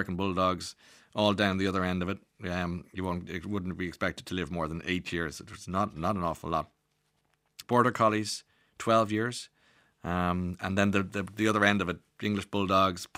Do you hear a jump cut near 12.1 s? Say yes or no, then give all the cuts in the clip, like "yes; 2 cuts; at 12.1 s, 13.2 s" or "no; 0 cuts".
no; 1 cut; at 7.6 s